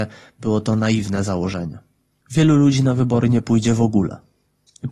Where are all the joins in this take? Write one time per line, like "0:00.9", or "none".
none

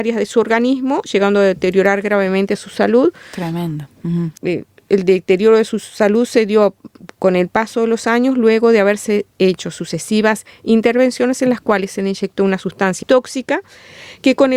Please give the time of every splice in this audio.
0:04.4
0:13.0

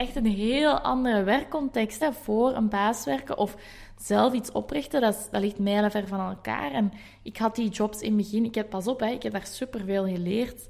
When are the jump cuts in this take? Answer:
none

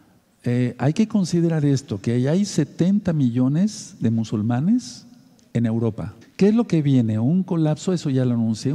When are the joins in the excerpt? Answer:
0:06.2

